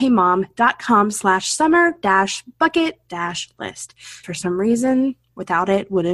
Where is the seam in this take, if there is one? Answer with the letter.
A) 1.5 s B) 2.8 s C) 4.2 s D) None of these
C